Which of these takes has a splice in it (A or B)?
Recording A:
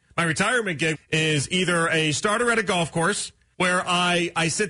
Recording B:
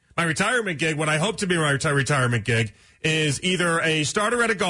A